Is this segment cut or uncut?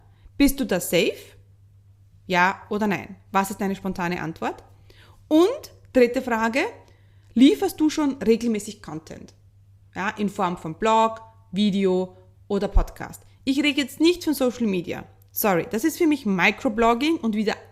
uncut